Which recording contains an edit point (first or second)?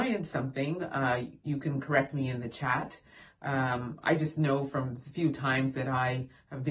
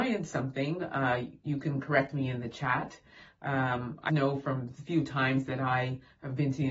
second